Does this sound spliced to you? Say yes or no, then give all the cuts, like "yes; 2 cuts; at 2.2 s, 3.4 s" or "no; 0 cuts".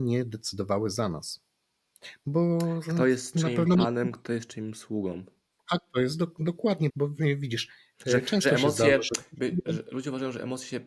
yes; 1 cut; at 6.9 s